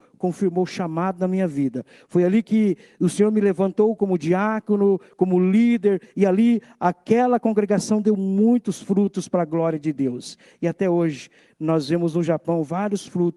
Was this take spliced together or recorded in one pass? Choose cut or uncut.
uncut